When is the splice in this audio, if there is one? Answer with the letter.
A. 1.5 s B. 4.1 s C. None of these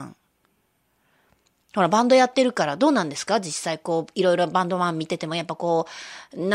C